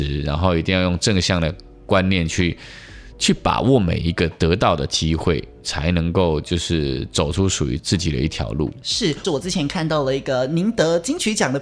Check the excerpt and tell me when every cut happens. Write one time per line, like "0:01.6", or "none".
0:07.8
0:09.2